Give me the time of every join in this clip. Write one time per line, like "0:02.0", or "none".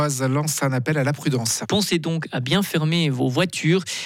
0:01.6